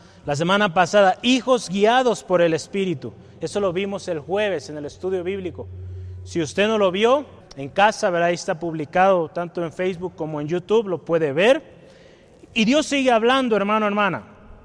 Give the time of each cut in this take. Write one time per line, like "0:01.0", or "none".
0:07.4